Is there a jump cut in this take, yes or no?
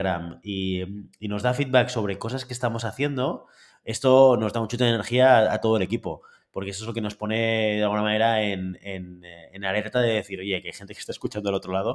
no